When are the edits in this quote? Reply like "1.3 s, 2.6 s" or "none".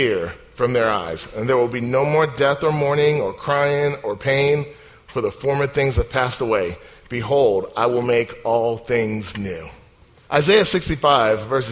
10.2 s